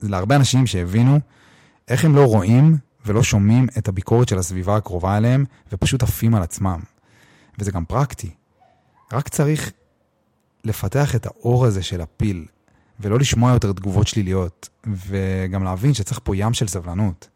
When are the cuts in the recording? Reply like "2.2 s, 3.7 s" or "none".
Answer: none

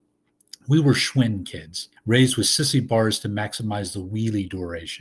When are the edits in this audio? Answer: 2.0 s

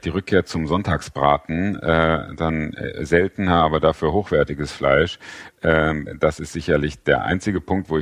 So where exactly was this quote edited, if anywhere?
none

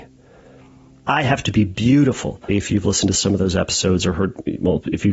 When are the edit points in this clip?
1.1 s, 2.5 s

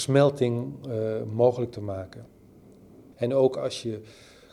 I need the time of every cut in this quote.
3.1 s

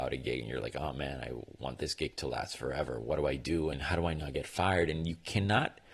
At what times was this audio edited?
3.7 s

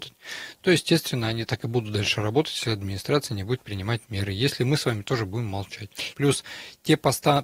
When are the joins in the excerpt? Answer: 6.1 s

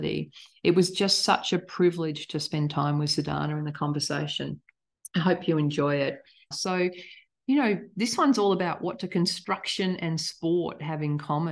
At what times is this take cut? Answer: 6.5 s

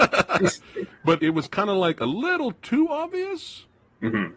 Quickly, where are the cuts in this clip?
1.2 s

